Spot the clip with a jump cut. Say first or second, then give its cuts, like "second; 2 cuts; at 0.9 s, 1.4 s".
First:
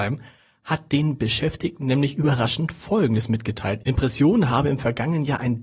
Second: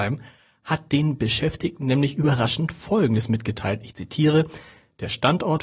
first; 1 cut; at 3.8 s